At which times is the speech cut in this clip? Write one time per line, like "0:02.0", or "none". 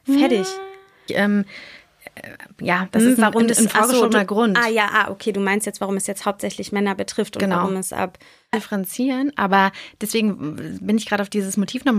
0:01.1
0:08.5